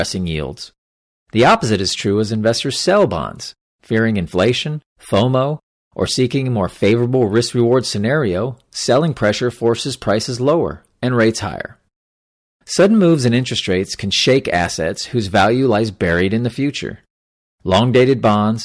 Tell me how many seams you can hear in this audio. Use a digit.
1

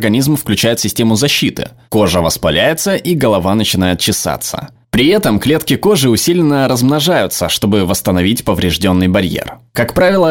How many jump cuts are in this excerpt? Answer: 0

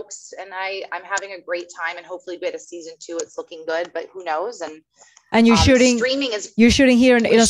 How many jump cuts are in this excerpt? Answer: 0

